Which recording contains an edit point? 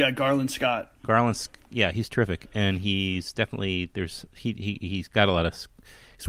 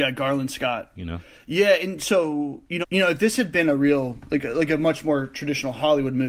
second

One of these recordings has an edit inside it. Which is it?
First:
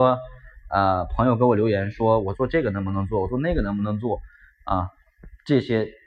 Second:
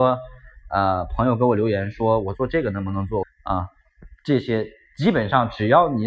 second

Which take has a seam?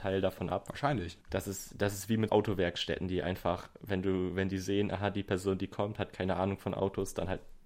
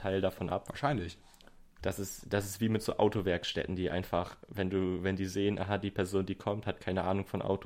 first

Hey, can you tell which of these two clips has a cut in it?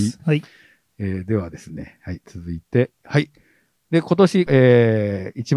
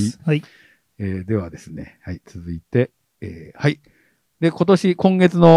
first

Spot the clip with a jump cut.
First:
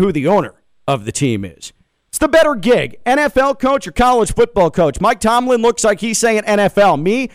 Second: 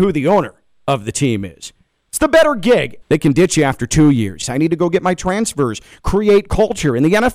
second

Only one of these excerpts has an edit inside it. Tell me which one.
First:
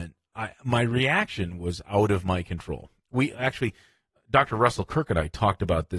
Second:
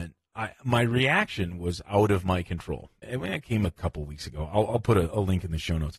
second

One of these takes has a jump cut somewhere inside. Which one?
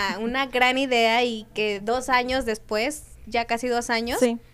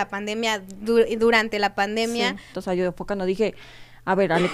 second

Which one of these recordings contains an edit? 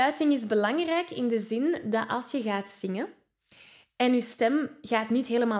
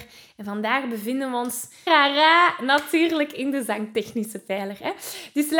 second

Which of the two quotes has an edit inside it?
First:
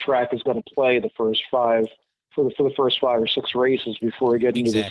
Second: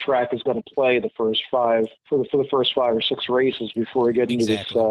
second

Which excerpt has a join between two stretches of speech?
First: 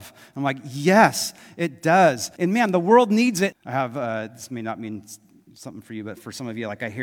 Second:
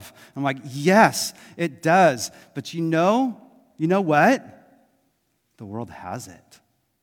first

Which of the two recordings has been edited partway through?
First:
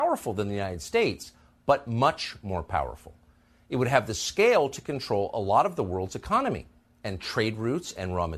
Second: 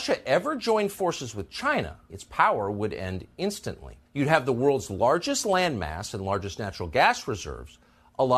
second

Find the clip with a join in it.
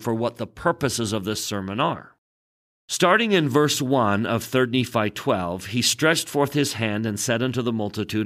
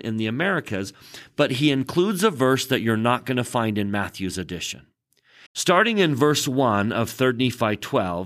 second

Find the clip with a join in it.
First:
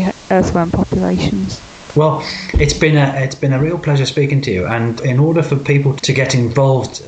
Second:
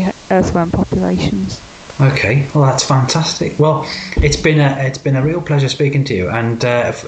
first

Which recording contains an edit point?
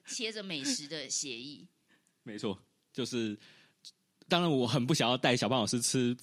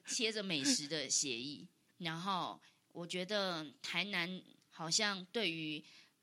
second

